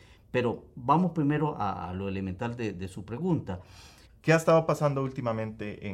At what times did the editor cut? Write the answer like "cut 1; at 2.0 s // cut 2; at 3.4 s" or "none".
cut 1; at 4.1 s